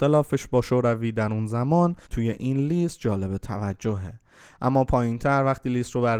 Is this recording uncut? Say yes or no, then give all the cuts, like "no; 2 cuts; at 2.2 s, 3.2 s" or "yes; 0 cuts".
no; 1 cut; at 2.0 s